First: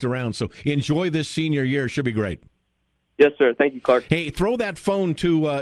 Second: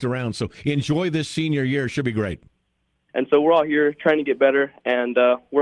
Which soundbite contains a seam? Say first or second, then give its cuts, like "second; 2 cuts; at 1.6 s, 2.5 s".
second; 1 cut; at 3.1 s